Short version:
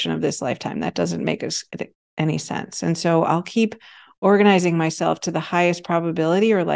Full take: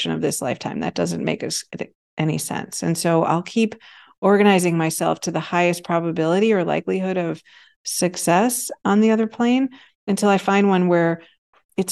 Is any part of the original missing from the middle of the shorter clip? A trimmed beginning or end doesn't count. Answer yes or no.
no